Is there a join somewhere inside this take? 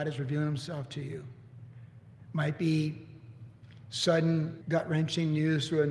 yes; 1 cut; at 4.6 s

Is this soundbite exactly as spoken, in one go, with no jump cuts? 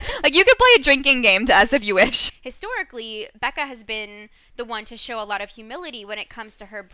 no; 1 cut; at 2.3 s

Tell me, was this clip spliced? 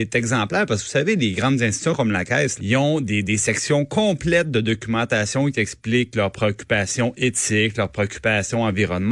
yes; 1 cut; at 2.6 s

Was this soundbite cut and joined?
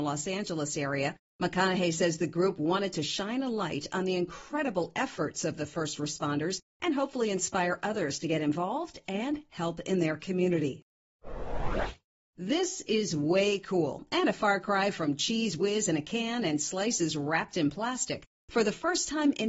no; 0 cuts

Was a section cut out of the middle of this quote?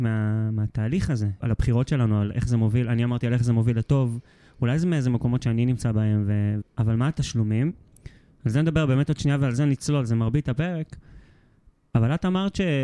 yes; 2 cuts; at 1.4 s, 6.6 s

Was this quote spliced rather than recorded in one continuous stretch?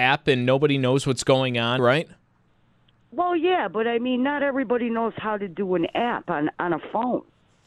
yes; 1 cut; at 1.8 s

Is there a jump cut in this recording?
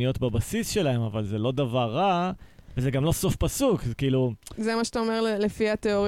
no; 0 cuts

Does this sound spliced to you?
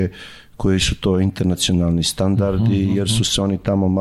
no; 0 cuts

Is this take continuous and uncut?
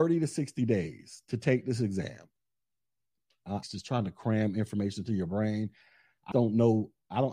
no; 2 cuts; at 3.6 s, 6.3 s

